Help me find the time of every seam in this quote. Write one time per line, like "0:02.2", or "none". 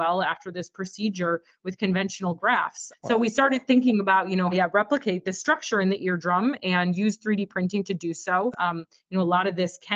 0:02.9
0:04.5
0:08.5